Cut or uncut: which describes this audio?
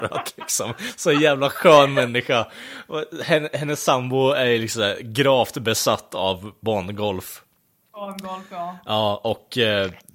uncut